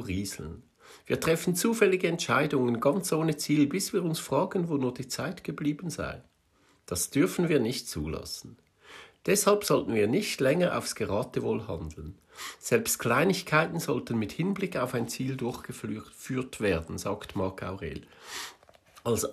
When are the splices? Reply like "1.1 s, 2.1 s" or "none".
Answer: none